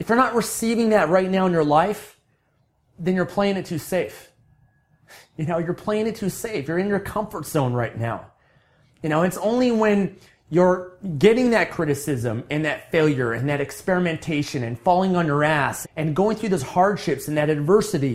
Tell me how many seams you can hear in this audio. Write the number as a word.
one